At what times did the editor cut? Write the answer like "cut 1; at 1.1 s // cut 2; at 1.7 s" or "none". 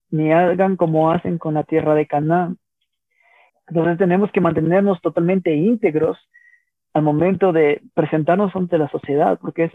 cut 1; at 3.5 s